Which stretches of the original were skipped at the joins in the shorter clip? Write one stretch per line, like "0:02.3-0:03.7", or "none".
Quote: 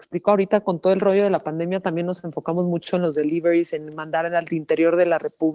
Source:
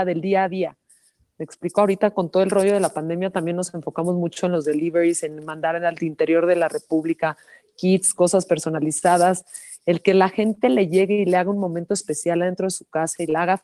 none